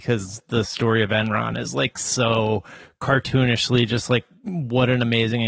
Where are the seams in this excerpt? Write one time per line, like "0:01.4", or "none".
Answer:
none